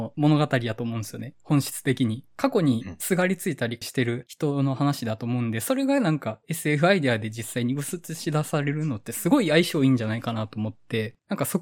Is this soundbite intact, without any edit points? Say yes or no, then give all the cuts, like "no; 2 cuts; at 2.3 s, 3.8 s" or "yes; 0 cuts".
yes; 0 cuts